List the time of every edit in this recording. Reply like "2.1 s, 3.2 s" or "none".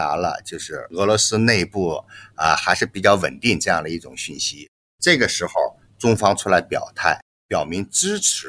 none